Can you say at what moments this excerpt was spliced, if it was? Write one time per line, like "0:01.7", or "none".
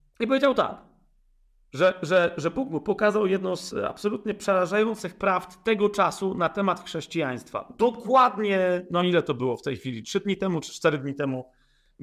none